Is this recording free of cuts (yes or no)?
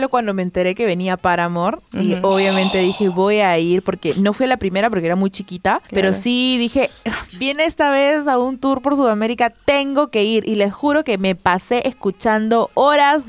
yes